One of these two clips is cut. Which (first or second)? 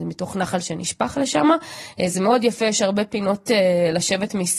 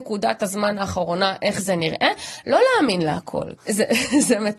second